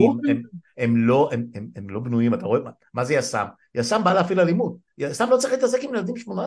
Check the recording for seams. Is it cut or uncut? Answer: uncut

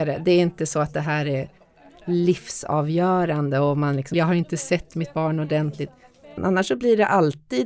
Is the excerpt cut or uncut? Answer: cut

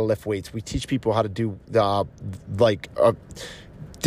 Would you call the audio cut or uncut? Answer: uncut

